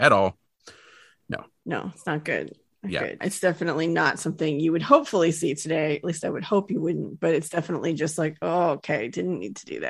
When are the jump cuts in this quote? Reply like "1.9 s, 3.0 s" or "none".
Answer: 3.2 s